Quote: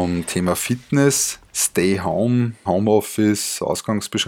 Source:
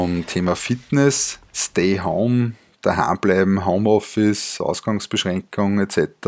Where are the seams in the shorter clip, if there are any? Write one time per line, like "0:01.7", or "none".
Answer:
0:02.7